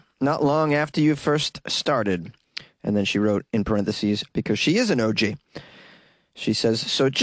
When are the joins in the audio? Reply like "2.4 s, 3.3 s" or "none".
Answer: 4.3 s